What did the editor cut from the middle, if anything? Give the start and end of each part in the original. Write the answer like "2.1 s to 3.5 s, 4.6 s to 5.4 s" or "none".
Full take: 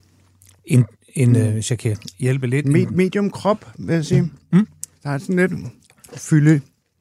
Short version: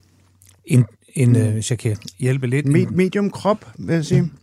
none